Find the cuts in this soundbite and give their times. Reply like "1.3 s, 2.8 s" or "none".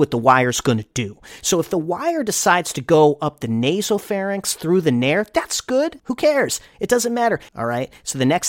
6.0 s, 7.5 s